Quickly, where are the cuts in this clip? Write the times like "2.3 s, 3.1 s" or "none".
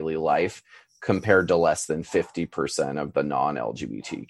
none